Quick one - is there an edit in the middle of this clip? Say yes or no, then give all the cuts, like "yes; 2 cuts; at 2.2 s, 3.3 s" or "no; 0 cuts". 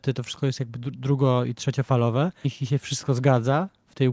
yes; 1 cut; at 2.4 s